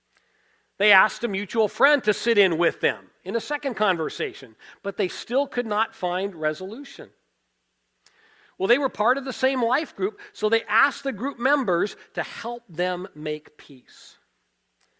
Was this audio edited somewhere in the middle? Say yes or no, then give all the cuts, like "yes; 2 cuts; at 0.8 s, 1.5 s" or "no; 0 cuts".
no; 0 cuts